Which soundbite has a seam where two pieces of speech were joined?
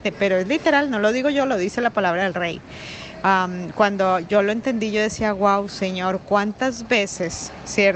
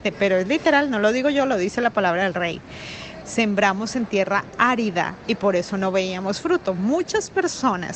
second; 1 cut; at 3.2 s

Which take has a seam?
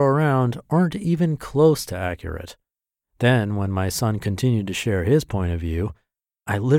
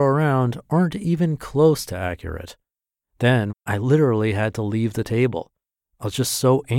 second; 1 cut; at 3.5 s

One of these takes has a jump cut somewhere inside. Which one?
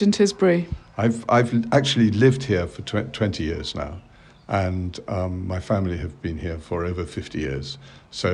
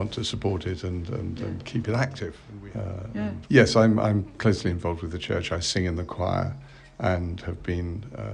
second; 1 cut; at 3.4 s

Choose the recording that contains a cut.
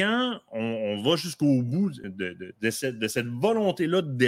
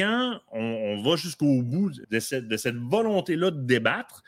second; 1 cut; at 2.0 s

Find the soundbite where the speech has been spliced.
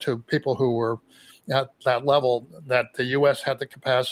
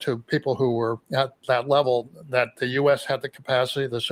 second; 1 cut; at 1.0 s

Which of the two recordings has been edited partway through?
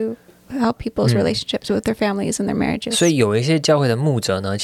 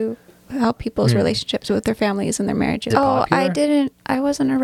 second; 1 cut; at 2.9 s

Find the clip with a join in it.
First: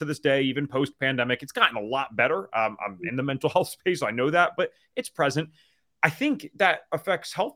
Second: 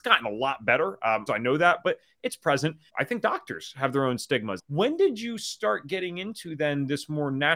second; 3 cuts; at 1.3 s, 2.9 s, 4.6 s

